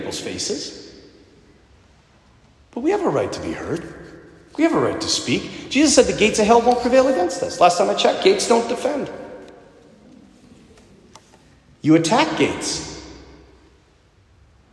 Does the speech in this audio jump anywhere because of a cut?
no; 0 cuts

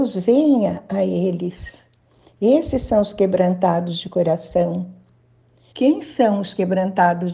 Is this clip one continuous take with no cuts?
no; 1 cut; at 5.7 s

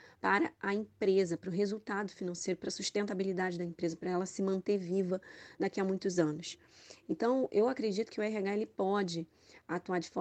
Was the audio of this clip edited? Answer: yes; 1 cut; at 7.0 s

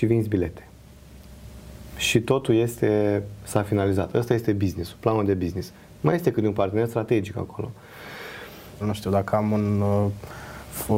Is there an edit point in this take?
yes; 1 cut; at 8.8 s

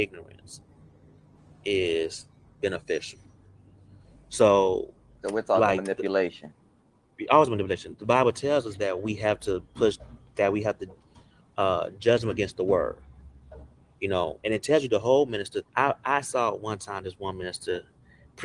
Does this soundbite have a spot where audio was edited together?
yes; 2 cuts; at 14.4 s, 15.7 s

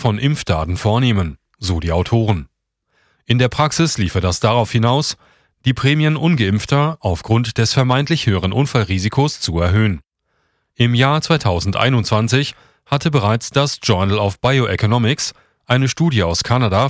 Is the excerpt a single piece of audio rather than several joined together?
yes; 0 cuts

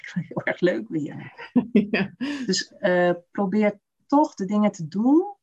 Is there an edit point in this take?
no; 0 cuts

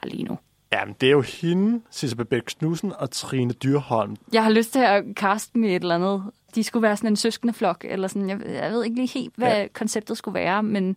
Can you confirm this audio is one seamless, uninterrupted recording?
no; 1 cut; at 4.2 s

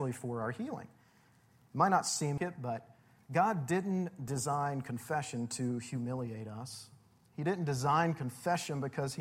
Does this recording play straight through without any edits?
no; 1 cut; at 2.4 s

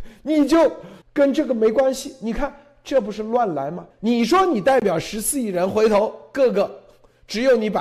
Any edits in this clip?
yes; 2 cuts; at 1.0 s, 3.9 s

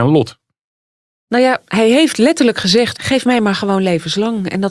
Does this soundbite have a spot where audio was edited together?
yes; 1 cut; at 2.9 s

